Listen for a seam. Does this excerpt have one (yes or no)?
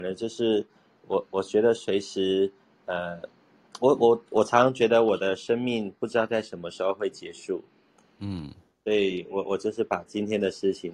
no